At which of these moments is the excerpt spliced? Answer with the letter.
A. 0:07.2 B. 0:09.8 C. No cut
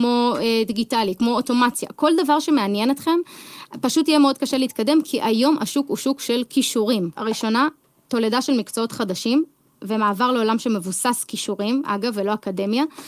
A